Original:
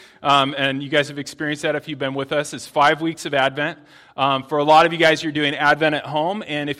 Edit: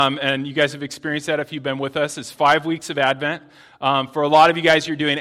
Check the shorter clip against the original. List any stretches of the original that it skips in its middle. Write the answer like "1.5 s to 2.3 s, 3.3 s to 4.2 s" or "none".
none